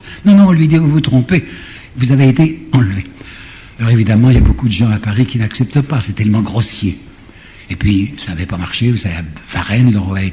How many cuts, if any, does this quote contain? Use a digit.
1